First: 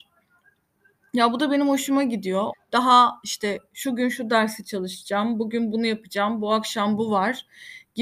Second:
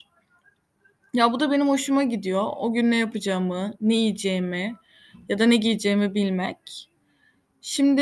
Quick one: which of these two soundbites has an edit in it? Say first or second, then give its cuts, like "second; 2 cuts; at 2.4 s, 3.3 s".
first; 1 cut; at 2.5 s